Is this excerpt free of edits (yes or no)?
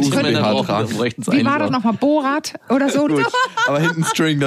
no